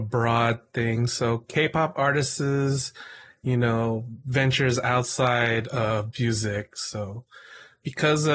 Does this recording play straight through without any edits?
yes; 0 cuts

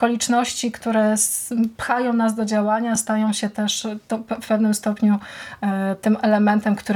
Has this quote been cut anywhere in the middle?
no; 0 cuts

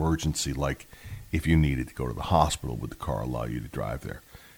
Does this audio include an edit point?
no; 0 cuts

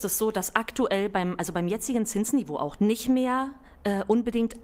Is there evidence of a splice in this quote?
yes; 1 cut; at 2.8 s

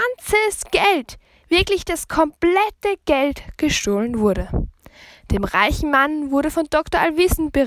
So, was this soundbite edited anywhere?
no; 0 cuts

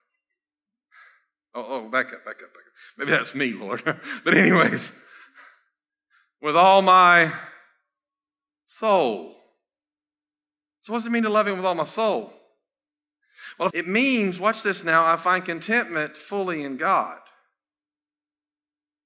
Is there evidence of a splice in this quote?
yes; 1 cut; at 13.7 s

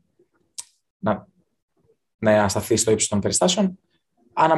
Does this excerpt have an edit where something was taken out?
no; 0 cuts

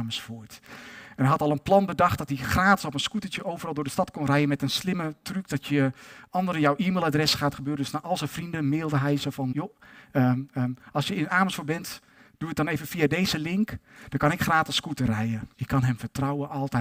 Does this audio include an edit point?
yes; 2 cuts; at 9.5 s, 15.5 s

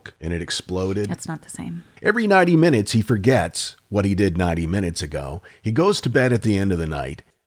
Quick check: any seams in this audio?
yes; 1 cut; at 2.0 s

